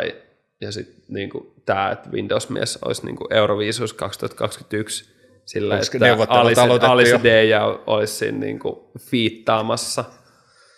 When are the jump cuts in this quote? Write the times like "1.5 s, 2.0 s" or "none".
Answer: none